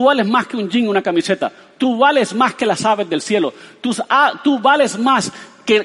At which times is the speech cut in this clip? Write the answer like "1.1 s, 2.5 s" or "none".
none